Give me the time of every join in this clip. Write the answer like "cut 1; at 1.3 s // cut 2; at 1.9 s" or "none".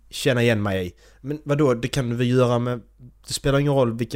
none